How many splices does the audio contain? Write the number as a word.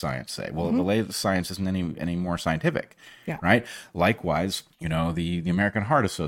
one